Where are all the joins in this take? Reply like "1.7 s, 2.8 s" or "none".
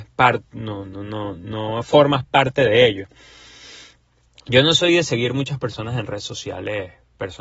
none